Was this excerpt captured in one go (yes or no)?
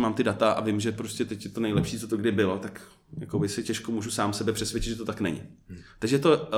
yes